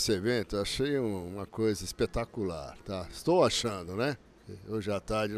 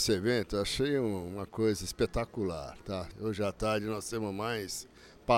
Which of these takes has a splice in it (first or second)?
second